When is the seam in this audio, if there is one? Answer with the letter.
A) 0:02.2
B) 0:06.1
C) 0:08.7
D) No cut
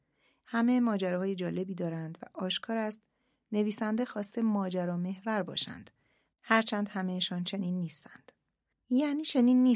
C